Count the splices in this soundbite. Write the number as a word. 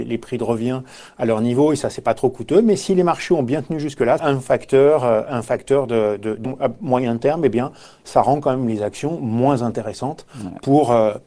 two